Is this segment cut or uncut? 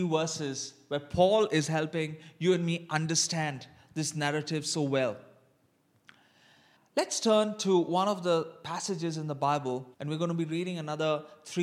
cut